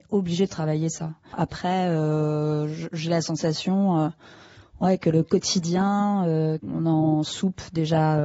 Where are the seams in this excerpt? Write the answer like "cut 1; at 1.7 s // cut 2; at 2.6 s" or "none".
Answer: cut 1; at 1.3 s // cut 2; at 6.6 s